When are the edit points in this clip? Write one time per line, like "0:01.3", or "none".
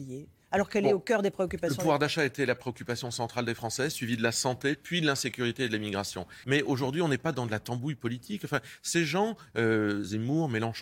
0:06.4